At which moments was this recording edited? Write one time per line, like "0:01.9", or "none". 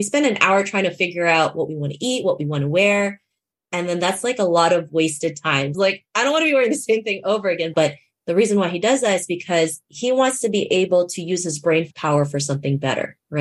0:05.7
0:07.7